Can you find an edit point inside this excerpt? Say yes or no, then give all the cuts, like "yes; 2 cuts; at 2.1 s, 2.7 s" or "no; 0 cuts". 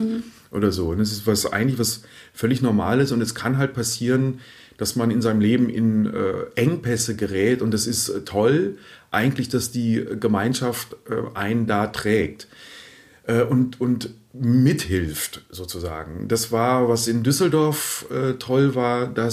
no; 0 cuts